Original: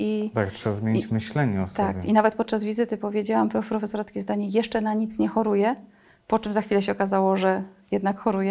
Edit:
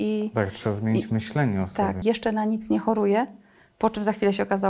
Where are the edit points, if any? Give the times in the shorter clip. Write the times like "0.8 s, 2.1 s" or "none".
2.0 s